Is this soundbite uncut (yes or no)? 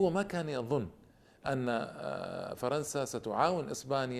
yes